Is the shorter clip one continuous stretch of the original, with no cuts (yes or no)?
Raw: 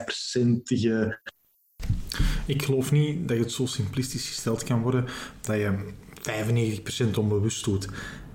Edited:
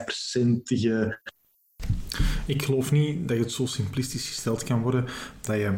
yes